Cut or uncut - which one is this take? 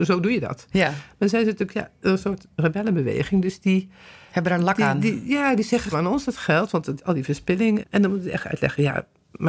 cut